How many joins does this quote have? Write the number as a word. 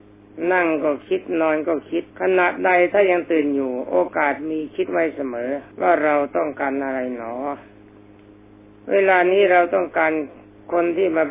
two